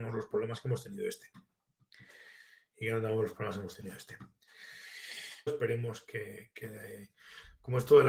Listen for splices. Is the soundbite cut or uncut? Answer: cut